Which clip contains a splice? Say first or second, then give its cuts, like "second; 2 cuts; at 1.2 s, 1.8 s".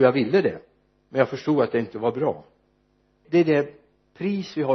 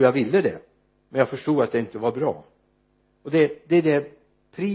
first; 1 cut; at 3.2 s